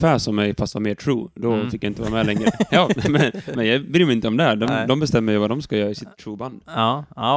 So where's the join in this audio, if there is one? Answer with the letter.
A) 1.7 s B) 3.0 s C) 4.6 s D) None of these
D